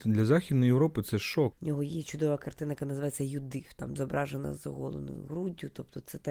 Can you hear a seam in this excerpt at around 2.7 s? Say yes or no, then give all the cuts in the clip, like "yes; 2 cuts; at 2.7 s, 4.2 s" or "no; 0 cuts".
no; 2 cuts; at 1.5 s, 4.0 s